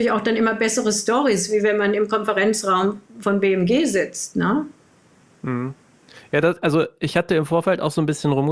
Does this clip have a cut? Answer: no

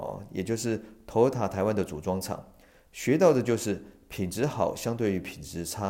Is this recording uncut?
yes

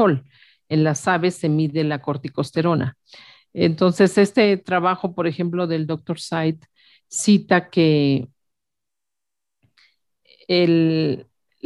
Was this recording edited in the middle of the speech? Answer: no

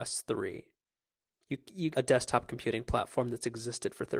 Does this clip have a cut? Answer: yes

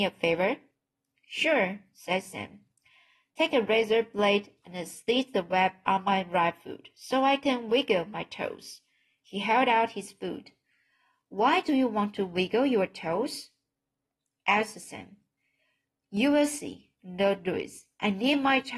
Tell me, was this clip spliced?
no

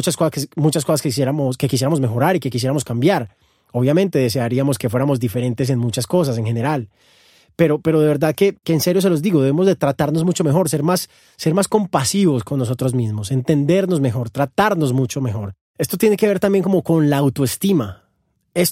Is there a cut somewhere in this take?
no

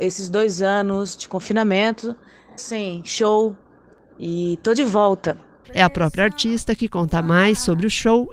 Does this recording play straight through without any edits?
no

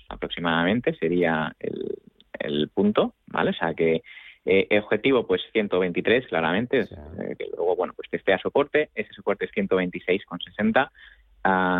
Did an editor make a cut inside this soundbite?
yes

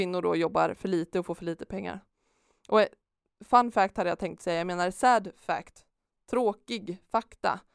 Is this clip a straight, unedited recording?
yes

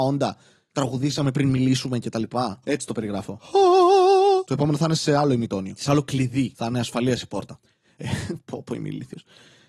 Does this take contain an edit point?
yes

